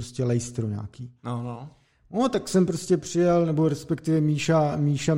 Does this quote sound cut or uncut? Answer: uncut